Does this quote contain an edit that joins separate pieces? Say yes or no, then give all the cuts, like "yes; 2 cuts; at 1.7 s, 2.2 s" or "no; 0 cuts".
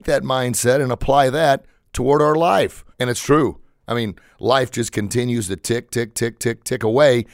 yes; 1 cut; at 2.9 s